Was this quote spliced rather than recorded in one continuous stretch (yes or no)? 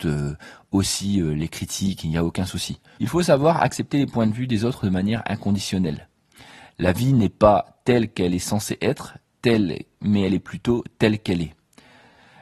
yes